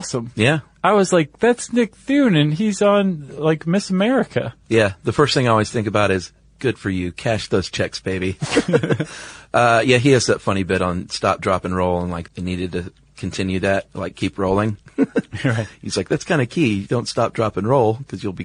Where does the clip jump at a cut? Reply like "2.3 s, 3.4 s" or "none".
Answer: 12.3 s